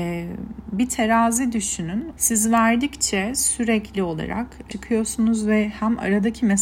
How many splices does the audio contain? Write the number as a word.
two